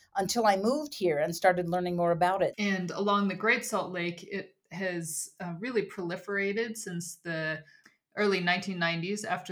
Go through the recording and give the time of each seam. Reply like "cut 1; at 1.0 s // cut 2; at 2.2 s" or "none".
cut 1; at 2.5 s